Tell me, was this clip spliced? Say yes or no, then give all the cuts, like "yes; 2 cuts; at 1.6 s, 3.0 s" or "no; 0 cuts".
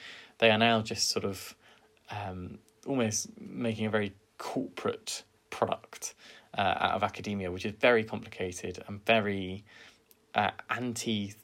no; 0 cuts